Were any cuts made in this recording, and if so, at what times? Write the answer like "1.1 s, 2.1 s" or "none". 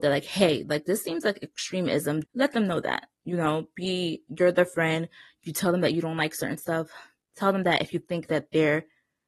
2.2 s